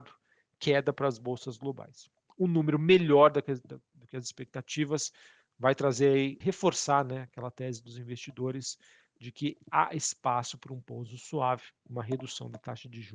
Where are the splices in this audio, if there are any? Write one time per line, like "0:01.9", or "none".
0:06.4
0:11.8